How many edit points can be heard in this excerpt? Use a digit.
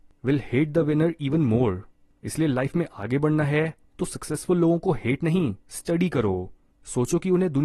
0